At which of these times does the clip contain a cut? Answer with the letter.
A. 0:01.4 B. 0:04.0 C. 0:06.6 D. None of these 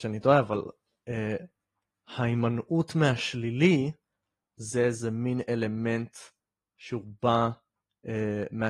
D